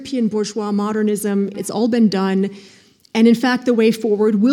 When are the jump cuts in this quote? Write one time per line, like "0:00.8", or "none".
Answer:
0:01.5